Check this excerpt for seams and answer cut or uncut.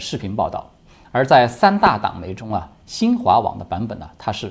cut